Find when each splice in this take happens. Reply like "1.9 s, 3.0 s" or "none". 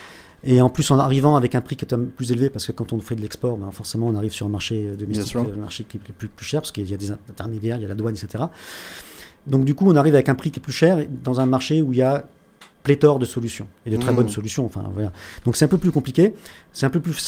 12.7 s